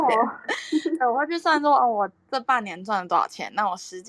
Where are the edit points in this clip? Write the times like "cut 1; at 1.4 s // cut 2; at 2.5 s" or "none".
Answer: none